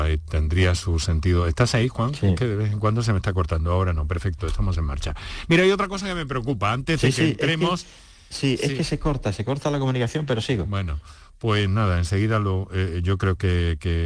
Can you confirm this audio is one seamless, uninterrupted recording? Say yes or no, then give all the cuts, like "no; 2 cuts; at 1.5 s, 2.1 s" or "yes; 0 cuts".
yes; 0 cuts